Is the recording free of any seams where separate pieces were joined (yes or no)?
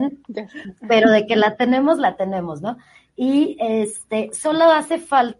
yes